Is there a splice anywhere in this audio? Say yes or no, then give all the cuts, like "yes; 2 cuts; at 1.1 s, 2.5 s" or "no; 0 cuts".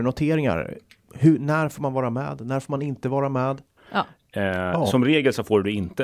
yes; 1 cut; at 3.8 s